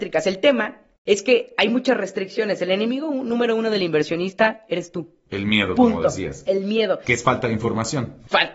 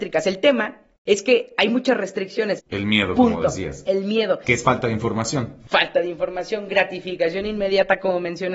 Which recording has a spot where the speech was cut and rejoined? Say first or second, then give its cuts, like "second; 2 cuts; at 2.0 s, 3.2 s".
second; 1 cut; at 2.6 s